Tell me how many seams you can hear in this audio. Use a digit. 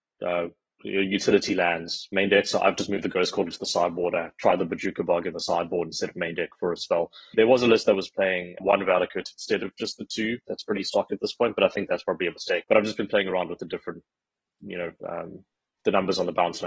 3